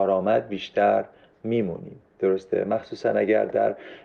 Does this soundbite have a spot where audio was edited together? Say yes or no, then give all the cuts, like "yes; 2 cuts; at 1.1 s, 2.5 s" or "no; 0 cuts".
yes; 1 cut; at 2.1 s